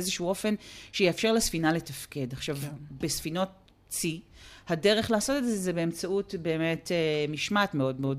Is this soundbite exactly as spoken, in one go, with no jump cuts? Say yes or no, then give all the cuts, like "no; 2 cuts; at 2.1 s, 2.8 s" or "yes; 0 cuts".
yes; 0 cuts